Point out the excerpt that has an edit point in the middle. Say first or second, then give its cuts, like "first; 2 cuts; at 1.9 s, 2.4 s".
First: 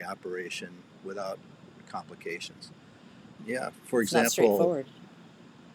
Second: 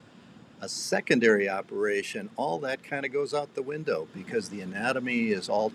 first; 1 cut; at 3.4 s